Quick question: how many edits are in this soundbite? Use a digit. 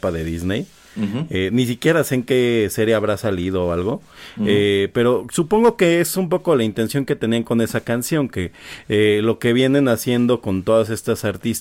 0